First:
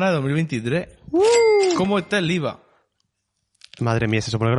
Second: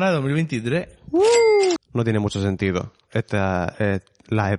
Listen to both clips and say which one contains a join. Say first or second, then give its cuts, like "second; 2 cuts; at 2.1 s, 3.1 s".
second; 1 cut; at 1.8 s